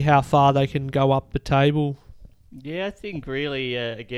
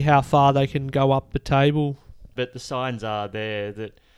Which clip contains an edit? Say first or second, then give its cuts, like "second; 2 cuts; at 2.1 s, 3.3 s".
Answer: second; 1 cut; at 2.4 s